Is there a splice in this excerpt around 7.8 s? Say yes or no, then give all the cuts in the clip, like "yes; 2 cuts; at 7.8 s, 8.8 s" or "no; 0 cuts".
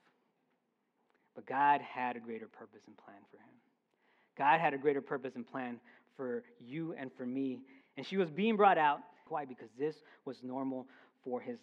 yes; 2 cuts; at 7.8 s, 9.3 s